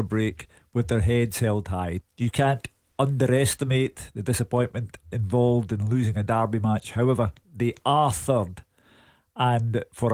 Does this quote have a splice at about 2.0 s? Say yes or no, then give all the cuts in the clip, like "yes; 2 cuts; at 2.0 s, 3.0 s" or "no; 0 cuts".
yes; 1 cut; at 2.0 s